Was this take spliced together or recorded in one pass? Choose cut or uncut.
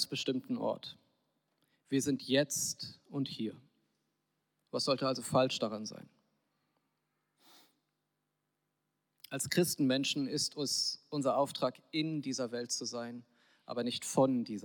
uncut